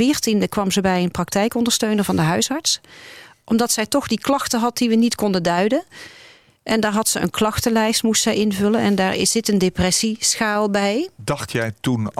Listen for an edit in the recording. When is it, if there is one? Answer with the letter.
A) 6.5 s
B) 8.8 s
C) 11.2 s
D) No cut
D